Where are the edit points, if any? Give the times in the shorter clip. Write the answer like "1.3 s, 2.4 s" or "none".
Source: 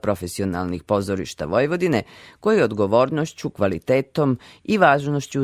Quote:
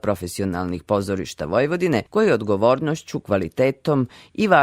2.1 s